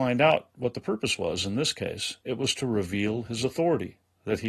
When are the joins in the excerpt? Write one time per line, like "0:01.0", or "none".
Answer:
none